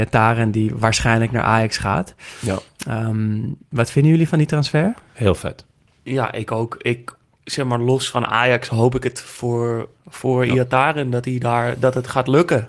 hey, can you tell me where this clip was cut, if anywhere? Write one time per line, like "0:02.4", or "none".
0:09.9